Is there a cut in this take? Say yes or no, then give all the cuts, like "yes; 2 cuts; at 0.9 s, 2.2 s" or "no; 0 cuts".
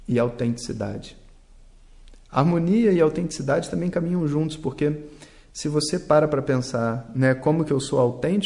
no; 0 cuts